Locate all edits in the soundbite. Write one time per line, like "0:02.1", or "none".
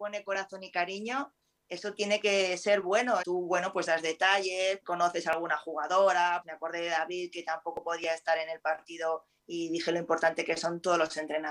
0:03.2
0:04.8
0:06.4